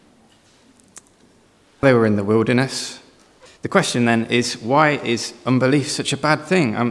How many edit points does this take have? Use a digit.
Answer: 2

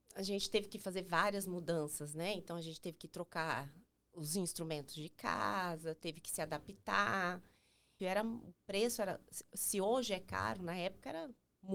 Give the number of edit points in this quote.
1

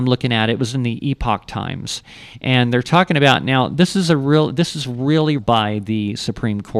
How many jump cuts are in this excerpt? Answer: 1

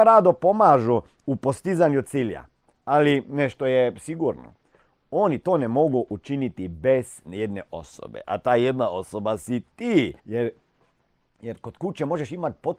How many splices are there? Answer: 1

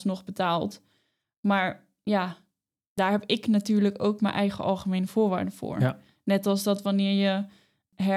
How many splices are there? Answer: 0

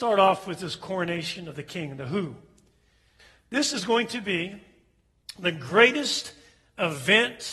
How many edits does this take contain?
0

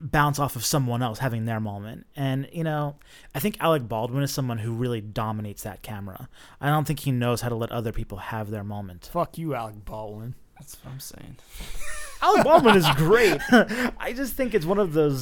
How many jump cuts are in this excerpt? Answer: 1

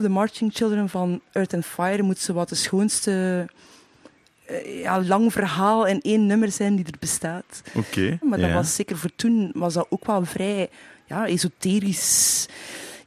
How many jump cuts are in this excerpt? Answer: 2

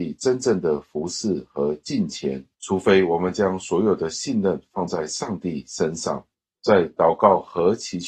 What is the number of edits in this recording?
1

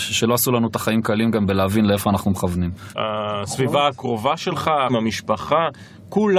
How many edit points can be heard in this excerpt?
2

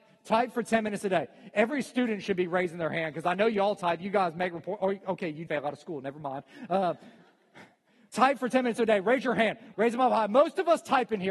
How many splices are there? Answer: 2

